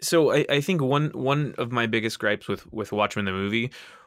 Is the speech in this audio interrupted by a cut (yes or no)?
no